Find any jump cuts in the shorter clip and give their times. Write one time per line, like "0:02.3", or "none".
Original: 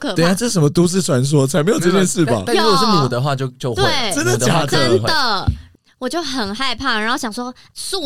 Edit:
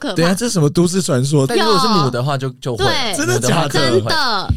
0:01.5